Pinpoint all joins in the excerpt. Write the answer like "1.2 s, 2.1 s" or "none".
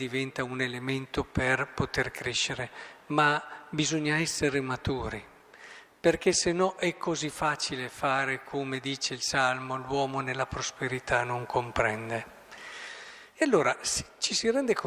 13.3 s